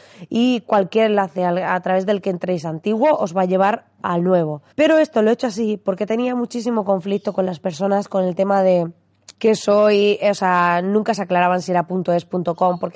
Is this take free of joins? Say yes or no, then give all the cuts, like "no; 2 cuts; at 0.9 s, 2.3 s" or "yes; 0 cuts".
no; 2 cuts; at 4.7 s, 9.3 s